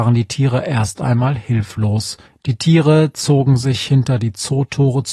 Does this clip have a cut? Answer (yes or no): yes